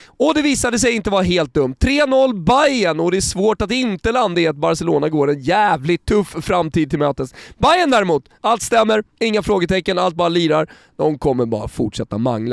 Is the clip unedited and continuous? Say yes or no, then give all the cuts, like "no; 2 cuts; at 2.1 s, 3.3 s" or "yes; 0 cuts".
yes; 0 cuts